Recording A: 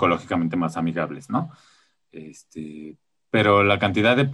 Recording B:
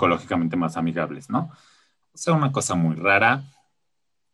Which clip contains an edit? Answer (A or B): B